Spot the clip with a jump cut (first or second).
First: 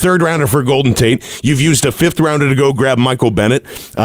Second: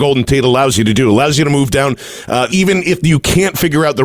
second